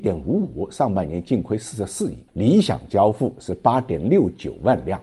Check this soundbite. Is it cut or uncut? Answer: cut